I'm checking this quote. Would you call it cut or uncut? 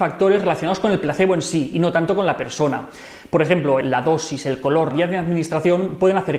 cut